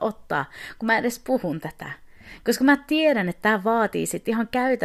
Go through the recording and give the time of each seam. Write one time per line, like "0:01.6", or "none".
none

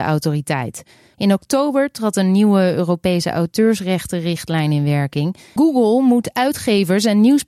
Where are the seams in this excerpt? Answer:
0:01.1
0:05.6

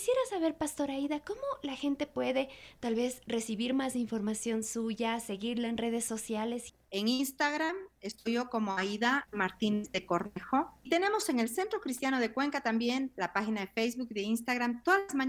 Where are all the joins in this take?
none

